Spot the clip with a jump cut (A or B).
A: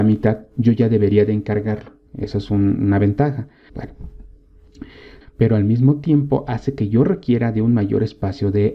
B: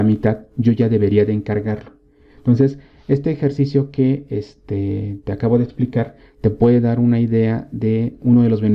A